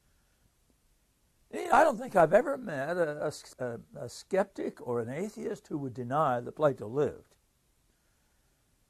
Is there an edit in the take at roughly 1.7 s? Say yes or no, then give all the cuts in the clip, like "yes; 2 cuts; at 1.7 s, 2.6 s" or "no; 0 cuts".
yes; 1 cut; at 1.7 s